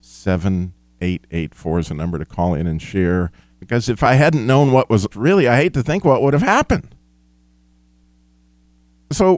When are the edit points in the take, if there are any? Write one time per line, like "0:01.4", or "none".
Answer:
0:03.5
0:05.1